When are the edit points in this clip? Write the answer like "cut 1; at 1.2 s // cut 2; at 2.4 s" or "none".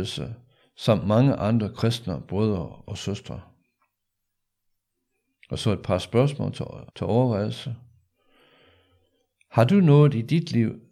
cut 1; at 6.9 s